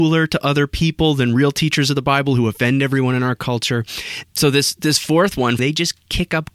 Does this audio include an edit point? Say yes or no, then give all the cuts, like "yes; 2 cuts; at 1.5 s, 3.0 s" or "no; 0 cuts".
yes; 2 cuts; at 4.2 s, 5.6 s